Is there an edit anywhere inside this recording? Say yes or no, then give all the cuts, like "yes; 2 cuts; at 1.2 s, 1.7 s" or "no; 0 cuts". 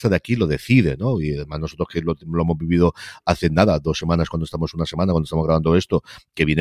no; 0 cuts